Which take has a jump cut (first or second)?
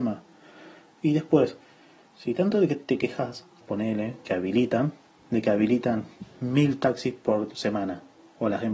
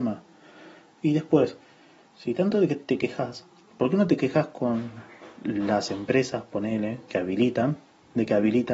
first